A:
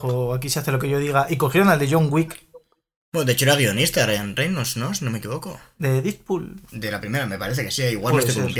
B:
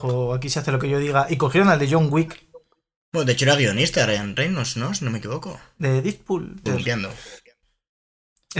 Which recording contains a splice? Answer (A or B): B